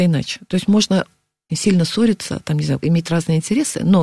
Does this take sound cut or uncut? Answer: cut